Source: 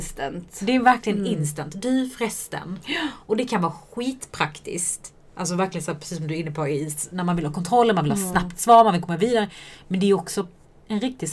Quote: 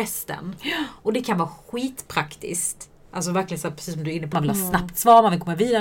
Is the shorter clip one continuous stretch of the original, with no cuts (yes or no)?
no